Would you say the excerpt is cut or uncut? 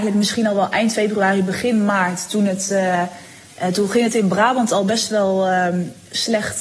uncut